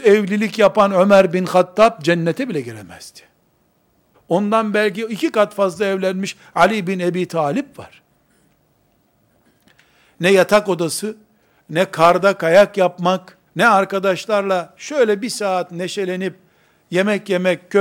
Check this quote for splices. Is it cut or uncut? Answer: cut